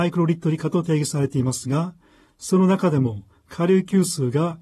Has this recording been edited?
no; 0 cuts

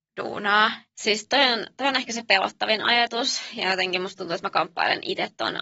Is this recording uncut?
yes; 0 cuts

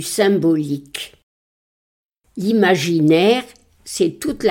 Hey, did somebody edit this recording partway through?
no; 0 cuts

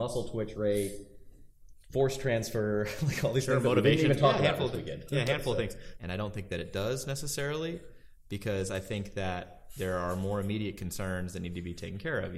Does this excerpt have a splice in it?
yes; 1 cut; at 6.0 s

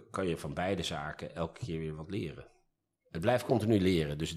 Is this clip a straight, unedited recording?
yes; 0 cuts

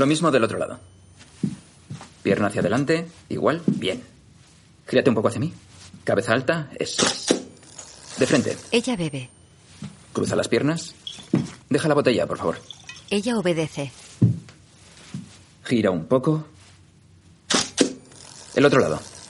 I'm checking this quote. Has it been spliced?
yes; 1 cut; at 11.6 s

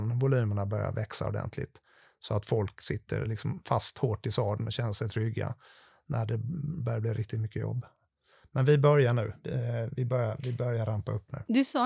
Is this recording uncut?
yes; 0 cuts

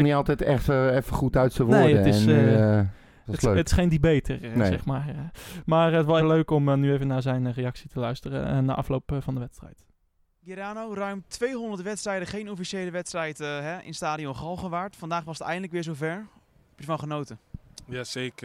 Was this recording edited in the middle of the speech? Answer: yes; 1 cut; at 6.2 s

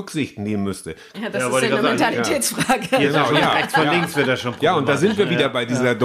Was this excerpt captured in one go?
no; 1 cut; at 1.1 s

